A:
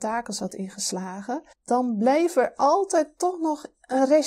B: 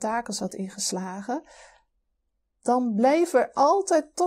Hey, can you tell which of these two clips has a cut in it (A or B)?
A